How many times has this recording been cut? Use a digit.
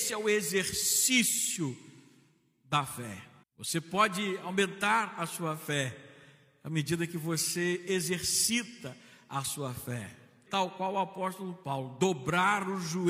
2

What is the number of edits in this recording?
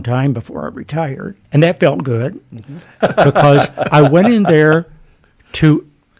2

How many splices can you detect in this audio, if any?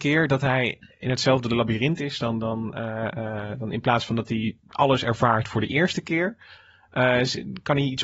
0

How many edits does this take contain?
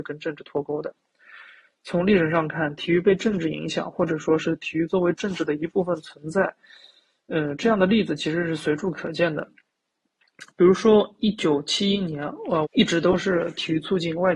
1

